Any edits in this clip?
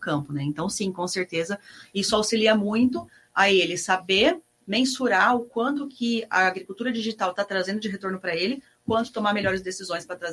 no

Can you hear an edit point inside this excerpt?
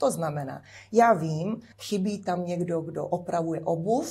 yes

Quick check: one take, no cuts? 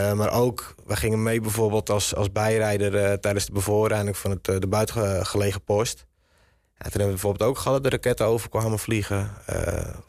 yes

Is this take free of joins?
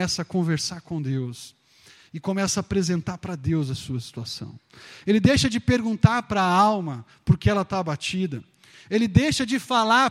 yes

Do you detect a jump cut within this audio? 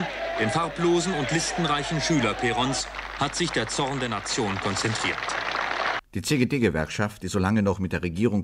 yes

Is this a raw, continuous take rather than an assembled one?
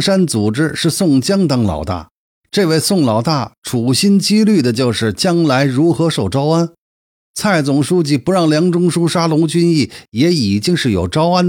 yes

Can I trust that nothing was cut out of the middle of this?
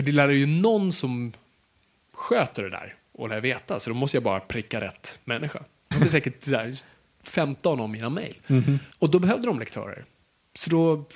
no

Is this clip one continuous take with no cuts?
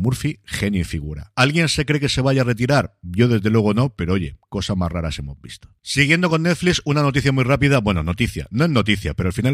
no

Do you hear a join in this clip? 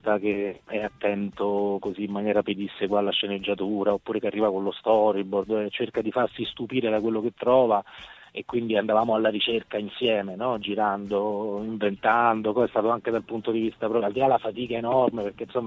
no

